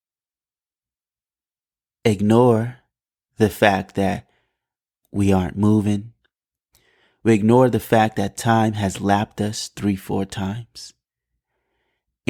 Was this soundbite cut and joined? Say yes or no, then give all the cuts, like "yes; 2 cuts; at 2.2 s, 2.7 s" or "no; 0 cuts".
no; 0 cuts